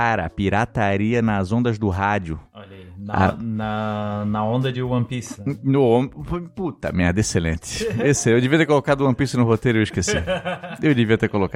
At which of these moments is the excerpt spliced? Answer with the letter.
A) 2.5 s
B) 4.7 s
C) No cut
B